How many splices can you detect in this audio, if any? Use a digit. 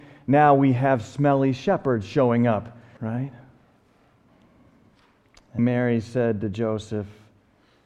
2